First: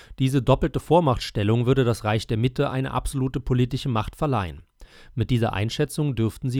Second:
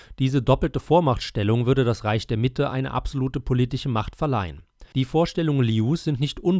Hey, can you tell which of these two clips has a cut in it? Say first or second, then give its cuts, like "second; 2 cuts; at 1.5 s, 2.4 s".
second; 1 cut; at 4.9 s